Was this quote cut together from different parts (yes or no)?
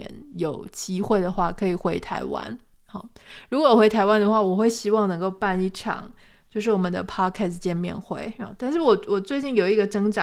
no